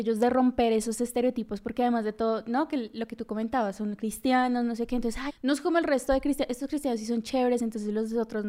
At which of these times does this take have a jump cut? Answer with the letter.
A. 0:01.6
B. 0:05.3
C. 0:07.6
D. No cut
B